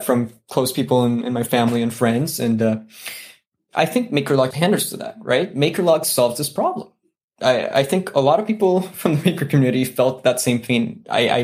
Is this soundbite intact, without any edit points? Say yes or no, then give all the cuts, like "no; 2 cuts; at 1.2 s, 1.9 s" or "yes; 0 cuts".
no; 1 cut; at 4.5 s